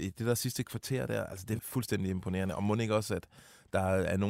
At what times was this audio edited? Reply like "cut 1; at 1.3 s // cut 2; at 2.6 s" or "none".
cut 1; at 1.6 s